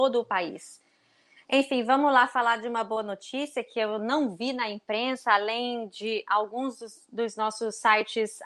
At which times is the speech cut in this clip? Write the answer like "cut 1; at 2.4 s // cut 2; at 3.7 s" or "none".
cut 1; at 1.4 s